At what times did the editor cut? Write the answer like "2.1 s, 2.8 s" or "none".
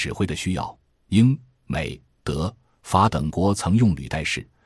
none